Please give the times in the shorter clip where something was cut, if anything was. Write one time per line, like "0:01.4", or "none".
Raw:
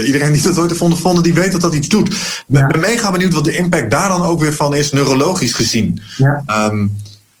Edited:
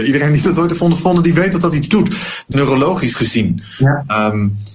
0:02.5